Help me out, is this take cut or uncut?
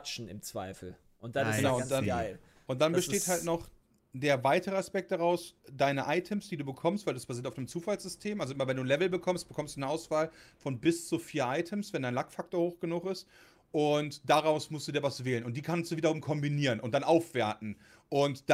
uncut